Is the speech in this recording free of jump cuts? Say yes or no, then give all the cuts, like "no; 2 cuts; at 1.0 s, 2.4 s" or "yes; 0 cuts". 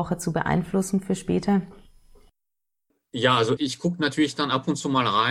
no; 1 cut; at 3.6 s